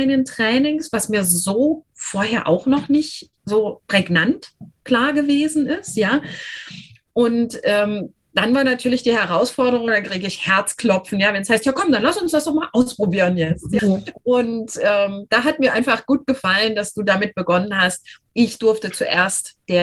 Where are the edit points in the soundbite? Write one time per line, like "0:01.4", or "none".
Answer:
0:09.9
0:13.8